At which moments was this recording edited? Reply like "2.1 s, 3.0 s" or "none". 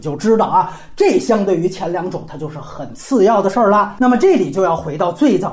none